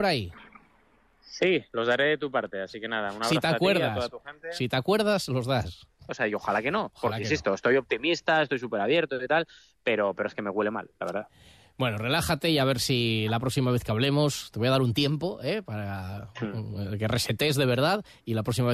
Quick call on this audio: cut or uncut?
cut